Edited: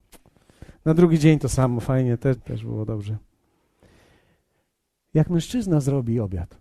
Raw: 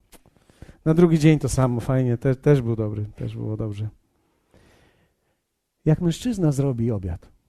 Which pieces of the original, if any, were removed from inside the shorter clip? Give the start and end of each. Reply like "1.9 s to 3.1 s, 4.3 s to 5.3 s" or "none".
2.4 s to 3.1 s